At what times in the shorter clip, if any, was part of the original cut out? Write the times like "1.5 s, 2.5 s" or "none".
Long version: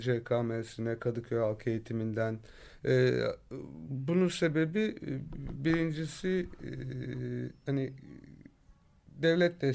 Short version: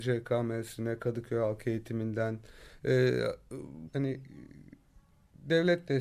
3.9 s